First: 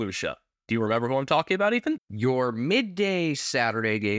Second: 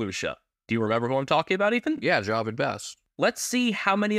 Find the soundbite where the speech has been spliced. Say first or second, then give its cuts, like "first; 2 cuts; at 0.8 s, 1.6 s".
first; 1 cut; at 2.0 s